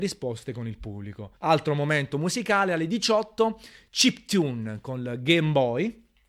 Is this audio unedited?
no; 1 cut; at 1.4 s

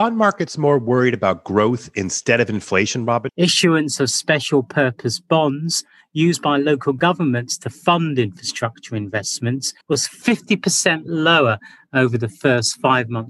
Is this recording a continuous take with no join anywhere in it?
no; 2 cuts; at 3.3 s, 9.8 s

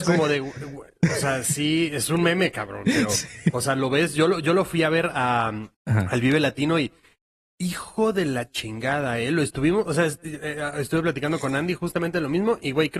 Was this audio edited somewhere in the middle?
yes; 1 cut; at 5.7 s

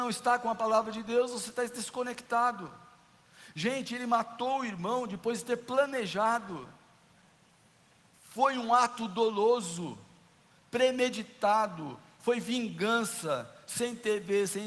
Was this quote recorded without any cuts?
yes; 0 cuts

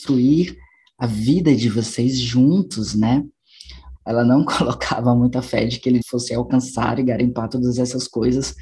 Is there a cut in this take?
yes; 2 cuts; at 4.0 s, 6.0 s

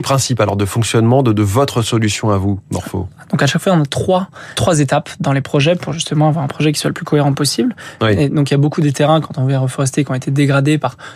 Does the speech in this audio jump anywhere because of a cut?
yes; 2 cuts; at 4.5 s, 8.0 s

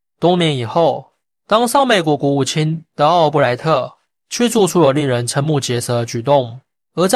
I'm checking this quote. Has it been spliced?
no; 0 cuts

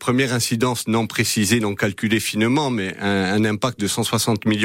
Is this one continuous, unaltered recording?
yes; 0 cuts

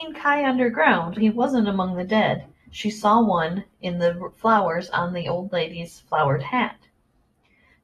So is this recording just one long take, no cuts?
no; 2 cuts; at 1.2 s, 2.6 s

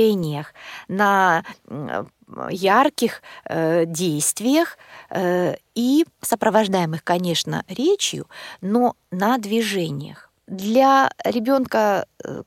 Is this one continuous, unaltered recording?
yes; 0 cuts

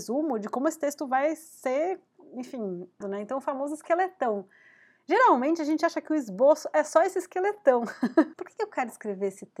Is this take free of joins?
no; 2 cuts; at 3.0 s, 8.3 s

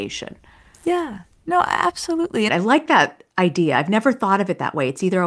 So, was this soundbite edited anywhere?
yes; 1 cut; at 2.5 s

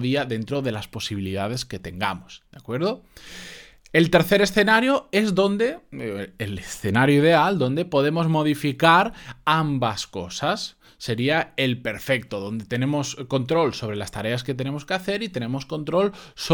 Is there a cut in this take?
no; 0 cuts

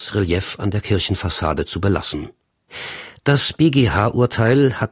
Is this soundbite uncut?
no; 1 cut; at 3.2 s

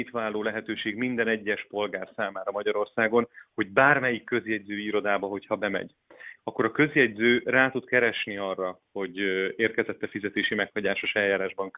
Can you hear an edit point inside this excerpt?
yes; 1 cut; at 6.4 s

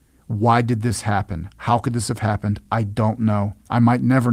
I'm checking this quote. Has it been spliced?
no; 0 cuts

